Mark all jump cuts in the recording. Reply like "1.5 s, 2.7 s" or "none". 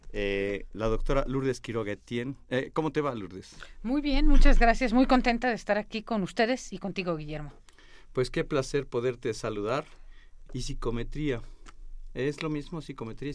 10.5 s